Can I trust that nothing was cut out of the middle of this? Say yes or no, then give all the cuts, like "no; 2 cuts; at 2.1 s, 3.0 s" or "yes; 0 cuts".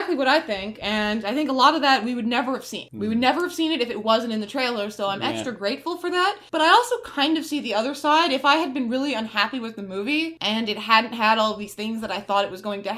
yes; 0 cuts